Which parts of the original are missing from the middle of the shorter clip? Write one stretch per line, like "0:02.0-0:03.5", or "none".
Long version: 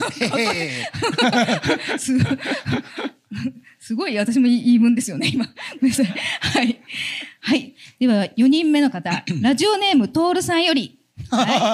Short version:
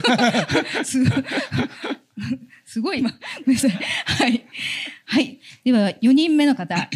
0:04.1-0:05.3